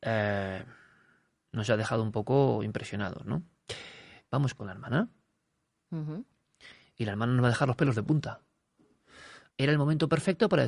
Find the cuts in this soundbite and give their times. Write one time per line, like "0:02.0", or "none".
0:04.2
0:09.5